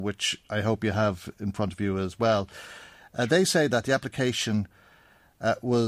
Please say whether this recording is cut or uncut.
uncut